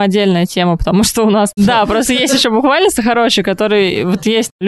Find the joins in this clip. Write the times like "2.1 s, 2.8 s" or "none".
1.6 s